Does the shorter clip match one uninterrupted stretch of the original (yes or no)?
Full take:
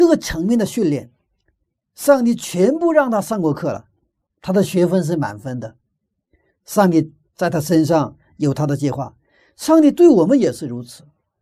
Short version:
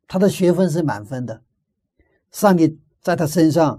yes